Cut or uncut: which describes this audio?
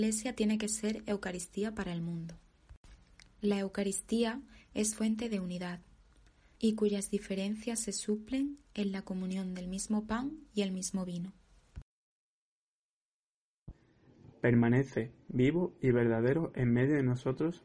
cut